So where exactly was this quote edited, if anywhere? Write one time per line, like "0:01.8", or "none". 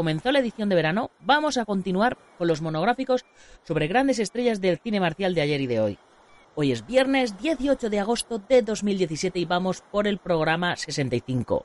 0:06.4